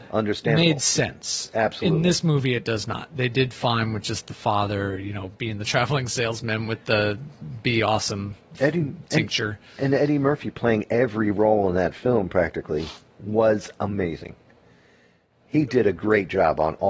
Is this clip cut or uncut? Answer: uncut